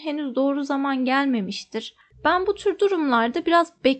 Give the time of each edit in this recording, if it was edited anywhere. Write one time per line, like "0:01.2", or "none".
0:02.1